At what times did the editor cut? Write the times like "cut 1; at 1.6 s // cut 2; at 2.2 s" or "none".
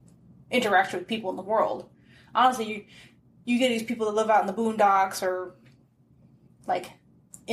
none